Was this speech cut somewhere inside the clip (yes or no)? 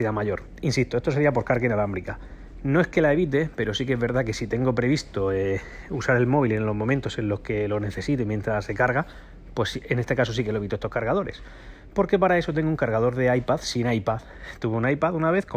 no